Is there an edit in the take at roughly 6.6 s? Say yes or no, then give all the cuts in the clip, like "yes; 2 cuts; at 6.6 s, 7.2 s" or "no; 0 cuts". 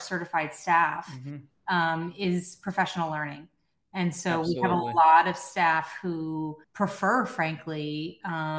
yes; 1 cut; at 6.6 s